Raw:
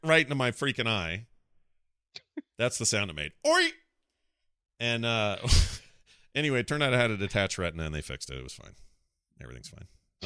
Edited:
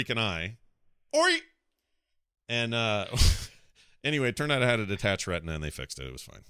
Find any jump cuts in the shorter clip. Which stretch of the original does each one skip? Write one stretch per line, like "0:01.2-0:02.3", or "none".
0:01.8-0:03.4